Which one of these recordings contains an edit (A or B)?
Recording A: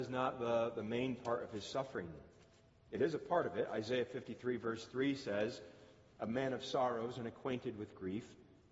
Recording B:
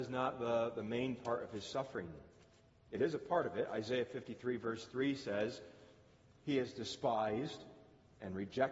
A